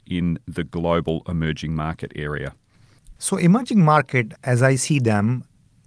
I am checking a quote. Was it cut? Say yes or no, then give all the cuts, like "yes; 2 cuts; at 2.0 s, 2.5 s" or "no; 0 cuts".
yes; 2 cuts; at 3.2 s, 4.3 s